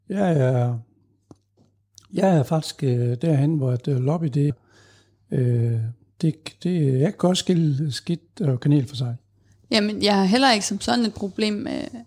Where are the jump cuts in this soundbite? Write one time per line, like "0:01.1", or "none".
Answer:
0:04.5